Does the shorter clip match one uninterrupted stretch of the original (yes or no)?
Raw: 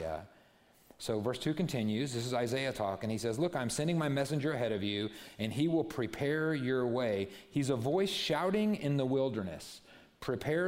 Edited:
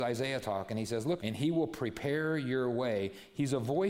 no